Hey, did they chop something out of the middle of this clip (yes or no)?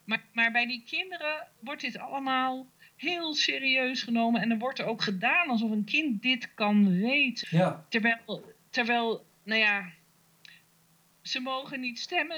yes